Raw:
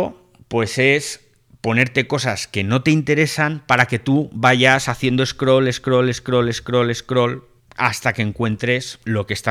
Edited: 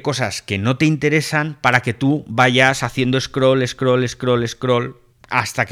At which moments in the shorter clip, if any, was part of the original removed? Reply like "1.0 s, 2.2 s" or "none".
4.5 s